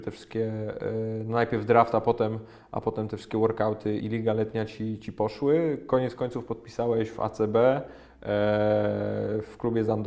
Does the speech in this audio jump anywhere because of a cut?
yes; 1 cut; at 4.0 s

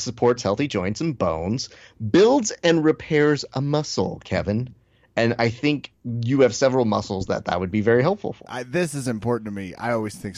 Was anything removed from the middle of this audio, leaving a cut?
yes; 1 cut; at 8.4 s

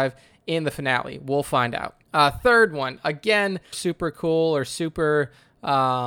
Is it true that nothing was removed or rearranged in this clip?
no; 2 cuts; at 2.0 s, 3.7 s

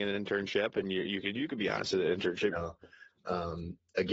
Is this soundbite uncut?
no; 1 cut; at 2.5 s

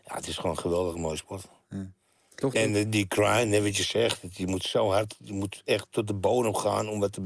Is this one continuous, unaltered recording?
yes; 0 cuts

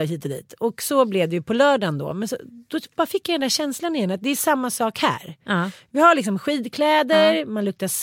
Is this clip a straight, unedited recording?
yes; 0 cuts

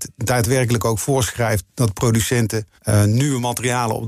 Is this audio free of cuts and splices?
no; 1 cut; at 2.8 s

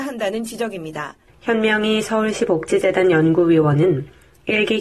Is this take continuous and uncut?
no; 1 cut; at 1.3 s

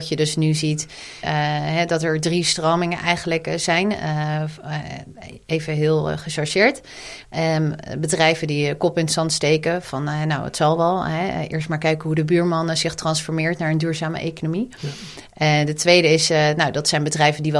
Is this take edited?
yes; 1 cut; at 1.2 s

